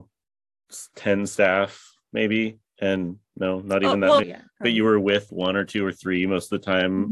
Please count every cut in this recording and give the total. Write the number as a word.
two